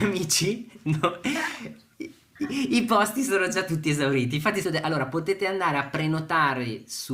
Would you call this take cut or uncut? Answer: cut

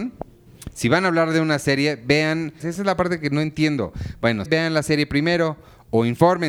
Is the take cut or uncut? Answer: cut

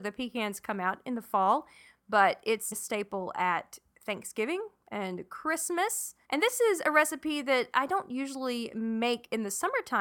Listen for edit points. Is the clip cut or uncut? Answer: cut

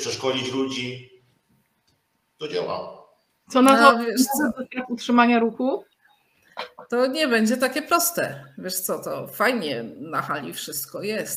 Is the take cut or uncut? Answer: uncut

